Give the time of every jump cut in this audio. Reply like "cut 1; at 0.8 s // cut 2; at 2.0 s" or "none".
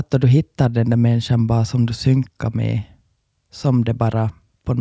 cut 1; at 3.3 s